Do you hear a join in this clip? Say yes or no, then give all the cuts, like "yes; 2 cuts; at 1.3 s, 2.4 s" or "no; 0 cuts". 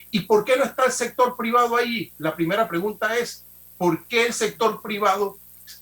no; 0 cuts